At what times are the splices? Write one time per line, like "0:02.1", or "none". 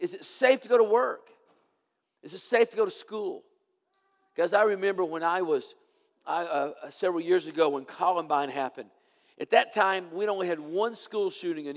none